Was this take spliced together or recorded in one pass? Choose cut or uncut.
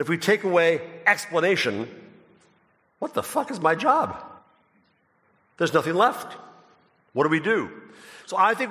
uncut